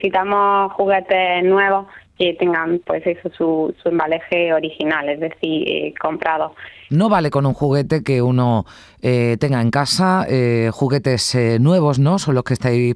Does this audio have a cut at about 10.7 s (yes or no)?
no